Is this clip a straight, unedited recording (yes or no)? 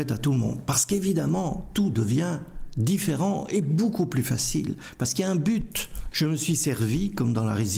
no